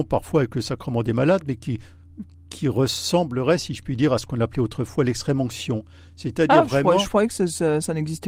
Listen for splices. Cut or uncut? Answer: uncut